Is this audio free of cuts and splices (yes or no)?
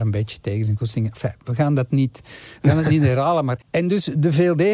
no